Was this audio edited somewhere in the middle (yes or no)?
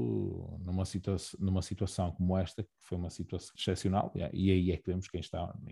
yes